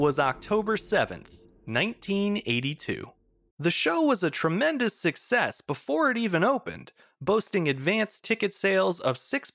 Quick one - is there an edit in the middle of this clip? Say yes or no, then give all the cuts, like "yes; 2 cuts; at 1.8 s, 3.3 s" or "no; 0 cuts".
yes; 1 cut; at 3.5 s